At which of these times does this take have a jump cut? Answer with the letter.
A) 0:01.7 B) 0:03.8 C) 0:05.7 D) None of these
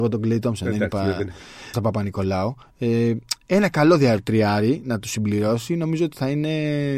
A